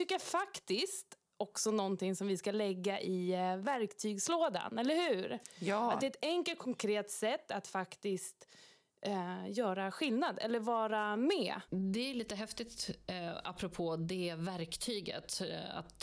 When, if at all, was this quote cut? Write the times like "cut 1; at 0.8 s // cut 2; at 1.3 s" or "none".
cut 1; at 11.7 s